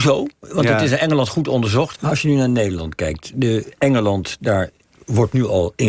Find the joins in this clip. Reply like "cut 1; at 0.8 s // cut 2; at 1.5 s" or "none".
cut 1; at 1.9 s